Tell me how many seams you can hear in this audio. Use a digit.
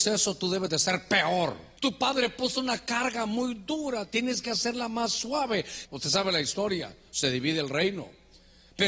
2